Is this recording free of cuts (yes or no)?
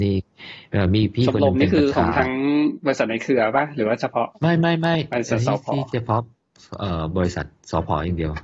yes